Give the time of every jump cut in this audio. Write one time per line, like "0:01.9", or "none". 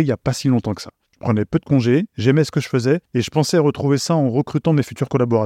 0:01.0